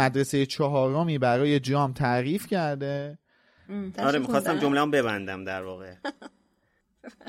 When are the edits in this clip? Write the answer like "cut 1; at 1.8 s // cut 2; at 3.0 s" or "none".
cut 1; at 3.9 s